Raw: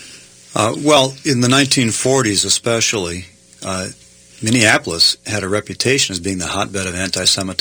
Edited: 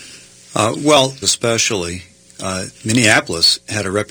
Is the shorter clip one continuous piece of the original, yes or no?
no